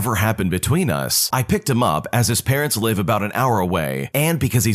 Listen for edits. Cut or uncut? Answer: cut